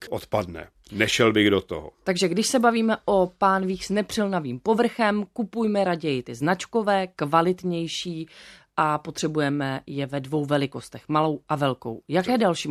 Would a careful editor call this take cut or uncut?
uncut